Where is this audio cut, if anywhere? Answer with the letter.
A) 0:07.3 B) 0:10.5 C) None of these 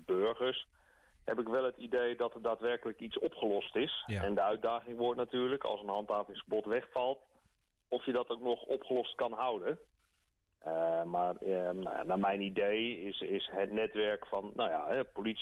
C